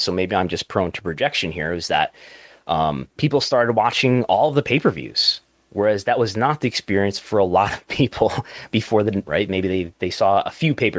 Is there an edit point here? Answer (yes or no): yes